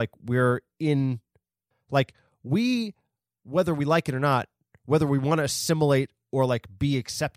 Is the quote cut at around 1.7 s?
yes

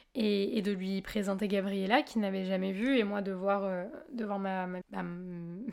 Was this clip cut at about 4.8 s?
yes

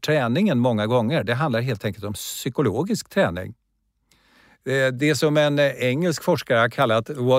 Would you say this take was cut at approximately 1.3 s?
no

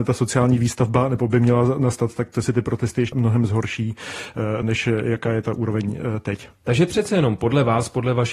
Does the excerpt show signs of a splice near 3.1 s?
yes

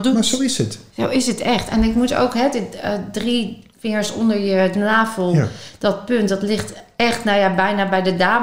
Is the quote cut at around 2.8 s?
no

